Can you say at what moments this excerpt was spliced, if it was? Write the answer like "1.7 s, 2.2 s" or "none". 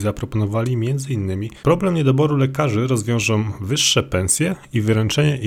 1.6 s